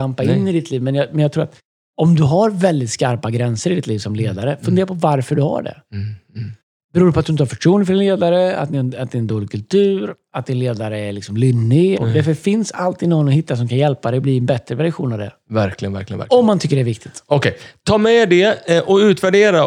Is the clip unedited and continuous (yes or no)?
no